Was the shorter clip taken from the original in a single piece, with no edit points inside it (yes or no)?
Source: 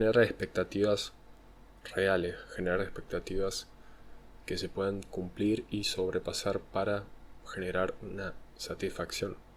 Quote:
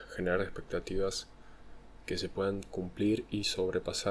yes